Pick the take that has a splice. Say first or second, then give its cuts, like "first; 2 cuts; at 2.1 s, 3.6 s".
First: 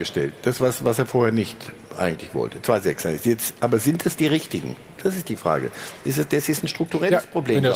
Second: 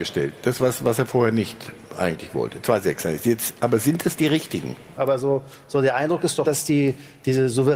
second; 2 cuts; at 5.0 s, 6.4 s